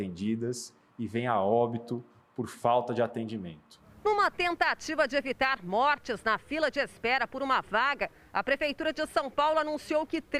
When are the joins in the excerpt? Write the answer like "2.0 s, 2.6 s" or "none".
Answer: none

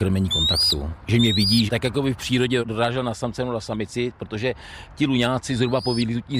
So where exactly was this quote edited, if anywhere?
1.7 s

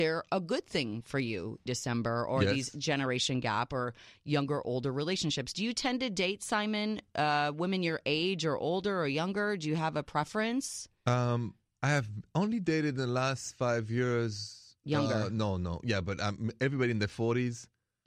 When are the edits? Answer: 1.7 s

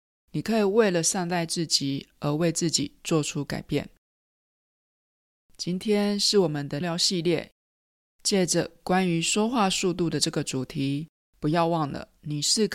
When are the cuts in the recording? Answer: 6.8 s, 11.3 s

